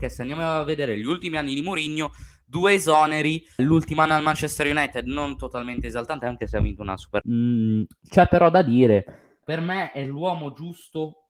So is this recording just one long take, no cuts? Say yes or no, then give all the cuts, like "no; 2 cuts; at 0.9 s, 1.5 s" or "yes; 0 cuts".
no; 3 cuts; at 3.6 s, 7.2 s, 9.4 s